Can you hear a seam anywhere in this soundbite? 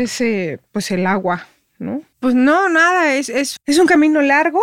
yes; 2 cuts; at 2.1 s, 3.6 s

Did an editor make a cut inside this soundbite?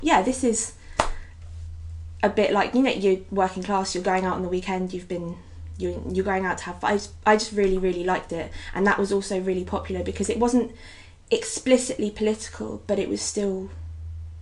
no; 0 cuts

